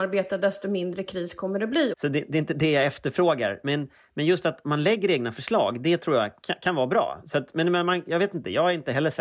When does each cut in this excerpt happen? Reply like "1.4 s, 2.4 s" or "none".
1.9 s

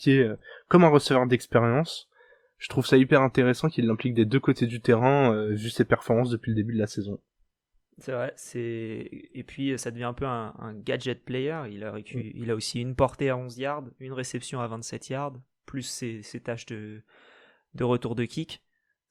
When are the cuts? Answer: none

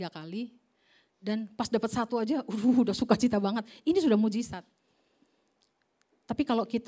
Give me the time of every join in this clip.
none

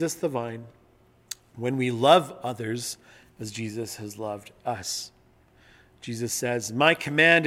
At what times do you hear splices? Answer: none

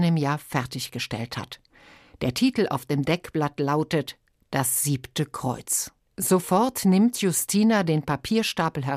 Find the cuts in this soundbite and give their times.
none

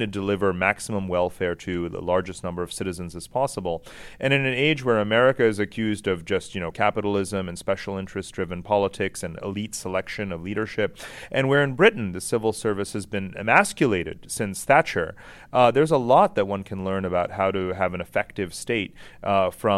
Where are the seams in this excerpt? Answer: 6.7 s

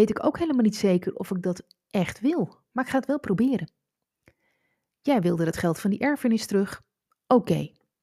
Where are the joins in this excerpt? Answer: none

